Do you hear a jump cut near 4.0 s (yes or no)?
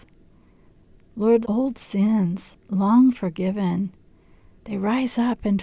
no